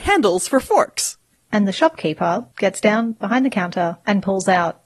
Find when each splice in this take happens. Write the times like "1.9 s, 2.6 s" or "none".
1.4 s